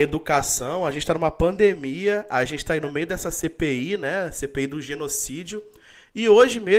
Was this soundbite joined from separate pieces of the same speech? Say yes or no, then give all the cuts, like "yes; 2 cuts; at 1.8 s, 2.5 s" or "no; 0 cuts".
no; 0 cuts